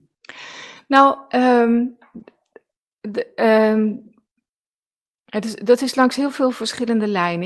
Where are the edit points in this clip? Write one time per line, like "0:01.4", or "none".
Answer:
none